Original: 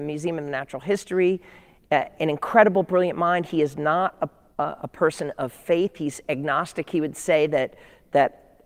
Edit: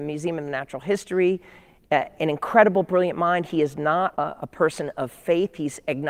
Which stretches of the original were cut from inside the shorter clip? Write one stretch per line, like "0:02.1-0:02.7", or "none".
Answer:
0:04.2-0:04.6

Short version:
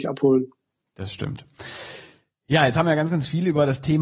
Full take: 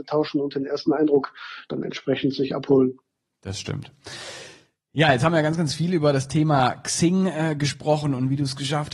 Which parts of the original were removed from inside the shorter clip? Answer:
none

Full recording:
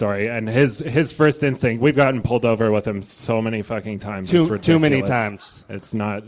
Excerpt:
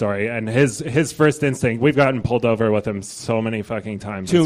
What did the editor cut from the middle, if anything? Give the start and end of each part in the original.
none

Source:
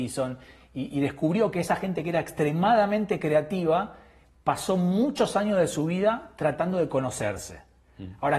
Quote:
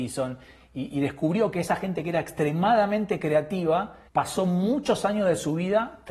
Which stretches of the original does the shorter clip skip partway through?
0:04.1-0:04.4

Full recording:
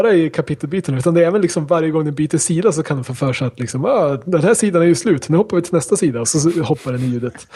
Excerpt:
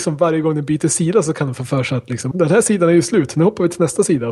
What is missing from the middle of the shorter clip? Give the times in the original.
0:03.8-0:04.2

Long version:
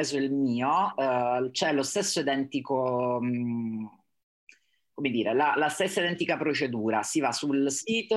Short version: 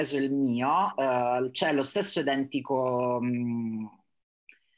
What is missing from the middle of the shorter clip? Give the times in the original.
none

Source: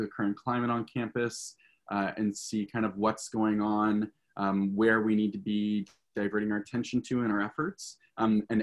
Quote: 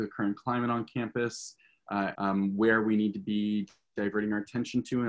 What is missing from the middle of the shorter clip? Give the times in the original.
0:02.1-0:04.3

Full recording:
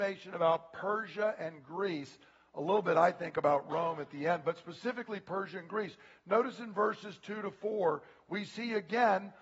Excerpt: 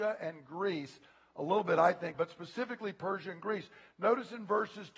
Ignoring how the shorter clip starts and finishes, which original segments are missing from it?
0:03.3-0:04.4

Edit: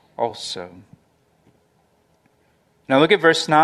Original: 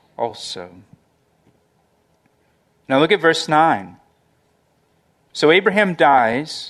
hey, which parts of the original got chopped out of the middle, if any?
none

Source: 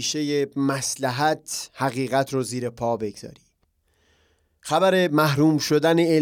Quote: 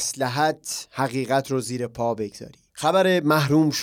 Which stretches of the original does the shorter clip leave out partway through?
0:03.5-0:04.6

